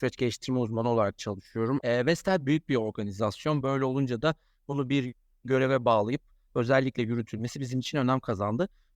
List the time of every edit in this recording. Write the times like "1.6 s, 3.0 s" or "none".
1.8 s, 3.6 s